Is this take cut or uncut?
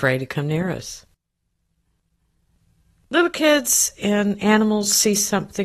uncut